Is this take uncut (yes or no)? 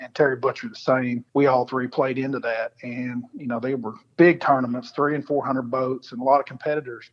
no